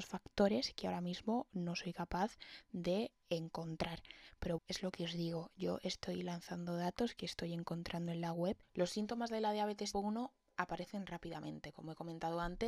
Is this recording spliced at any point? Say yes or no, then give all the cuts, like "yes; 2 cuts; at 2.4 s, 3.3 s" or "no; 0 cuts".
yes; 3 cuts; at 4.6 s, 8.6 s, 9.9 s